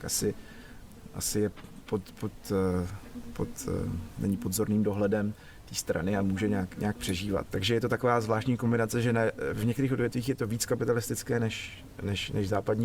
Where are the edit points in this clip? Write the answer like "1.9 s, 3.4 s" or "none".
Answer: 7.5 s